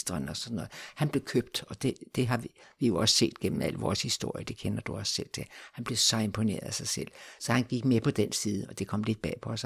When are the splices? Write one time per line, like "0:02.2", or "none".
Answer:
none